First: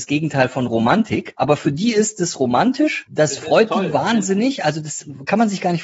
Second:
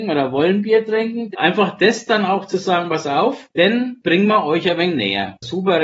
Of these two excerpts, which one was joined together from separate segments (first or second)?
second